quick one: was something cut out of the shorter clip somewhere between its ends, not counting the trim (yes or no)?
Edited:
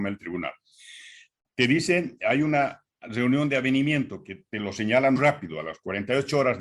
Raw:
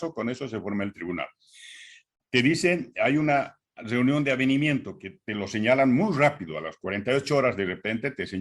yes